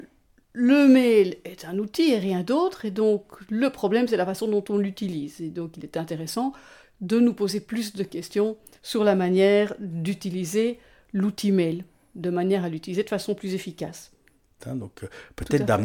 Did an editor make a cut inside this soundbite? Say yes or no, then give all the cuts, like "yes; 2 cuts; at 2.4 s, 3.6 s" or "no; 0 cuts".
yes; 1 cut; at 14.6 s